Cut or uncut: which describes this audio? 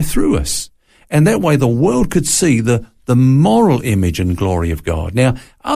uncut